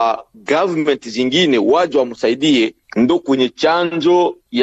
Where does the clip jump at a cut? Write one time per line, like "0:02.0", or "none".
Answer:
0:02.8